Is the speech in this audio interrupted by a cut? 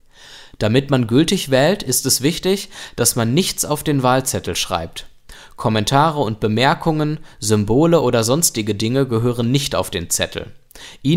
no; 0 cuts

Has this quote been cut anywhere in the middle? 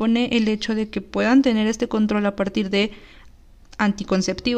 no; 0 cuts

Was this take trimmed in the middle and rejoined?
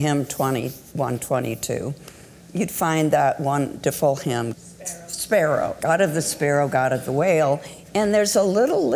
yes; 2 cuts; at 4.5 s, 5.8 s

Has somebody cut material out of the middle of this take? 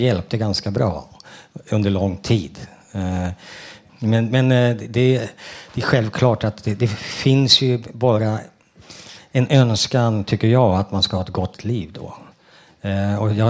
yes; 1 cut; at 3.9 s

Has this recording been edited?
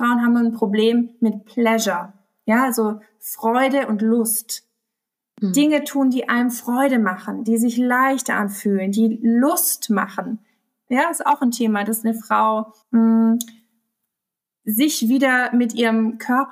yes; 2 cuts; at 10.9 s, 12.8 s

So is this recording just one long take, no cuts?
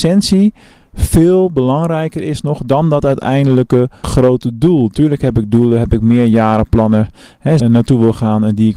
no; 2 cuts; at 4.0 s, 7.6 s

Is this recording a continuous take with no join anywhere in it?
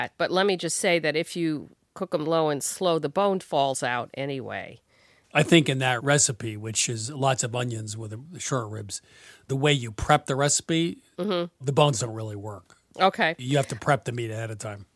yes; 0 cuts

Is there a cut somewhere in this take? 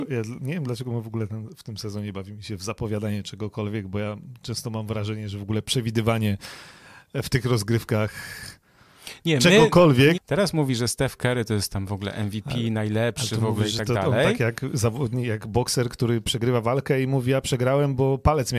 yes; 1 cut; at 10.1 s

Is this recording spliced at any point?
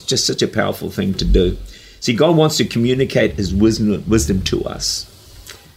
no; 0 cuts

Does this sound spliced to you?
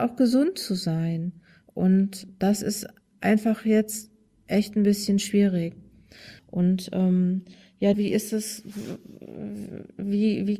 yes; 2 cuts; at 6.4 s, 7.9 s

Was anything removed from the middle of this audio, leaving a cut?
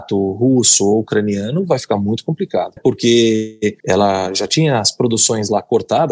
yes; 2 cuts; at 2.8 s, 3.8 s

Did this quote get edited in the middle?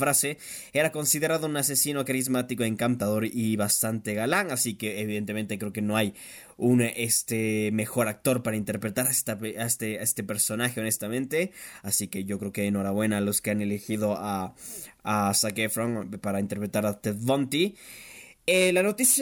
no; 0 cuts

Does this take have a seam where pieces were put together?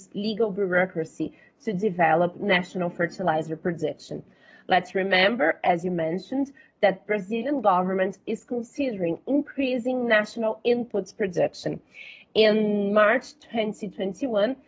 no; 0 cuts

